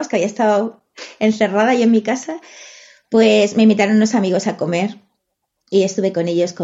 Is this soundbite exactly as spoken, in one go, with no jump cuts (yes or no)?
yes